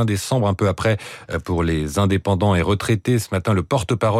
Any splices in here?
no; 0 cuts

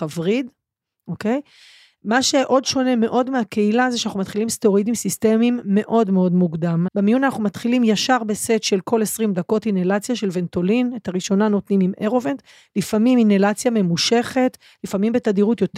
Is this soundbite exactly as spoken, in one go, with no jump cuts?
no; 1 cut; at 6.9 s

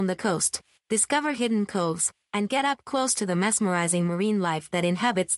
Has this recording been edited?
no; 0 cuts

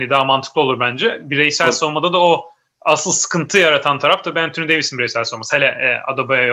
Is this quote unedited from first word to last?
yes; 0 cuts

